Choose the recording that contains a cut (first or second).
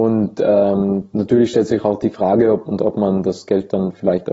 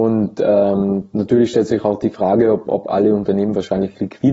first